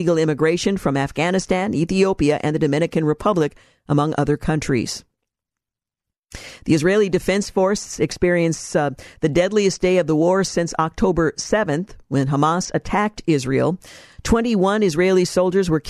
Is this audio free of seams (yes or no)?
yes